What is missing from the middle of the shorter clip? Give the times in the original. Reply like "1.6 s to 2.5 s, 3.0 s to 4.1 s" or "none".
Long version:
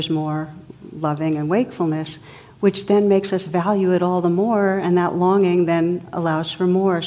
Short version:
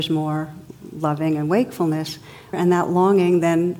2.5 s to 4.8 s